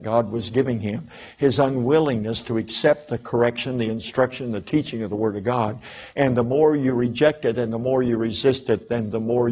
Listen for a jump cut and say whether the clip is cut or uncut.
uncut